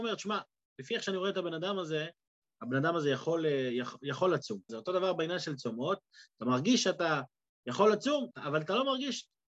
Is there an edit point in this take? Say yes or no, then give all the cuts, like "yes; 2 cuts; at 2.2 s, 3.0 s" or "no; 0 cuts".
yes; 2 cuts; at 4.7 s, 8.3 s